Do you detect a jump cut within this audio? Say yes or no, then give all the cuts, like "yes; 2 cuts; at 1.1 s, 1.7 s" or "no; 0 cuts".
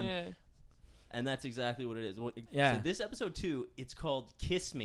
yes; 1 cut; at 2.5 s